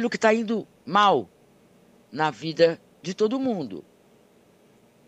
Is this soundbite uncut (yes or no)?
yes